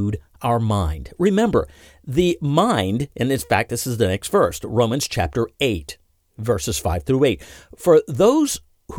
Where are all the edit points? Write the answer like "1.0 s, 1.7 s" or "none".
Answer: none